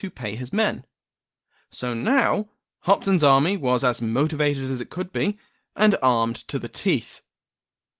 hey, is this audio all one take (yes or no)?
yes